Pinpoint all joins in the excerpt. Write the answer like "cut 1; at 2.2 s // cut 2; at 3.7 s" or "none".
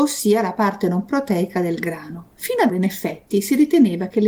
cut 1; at 2.7 s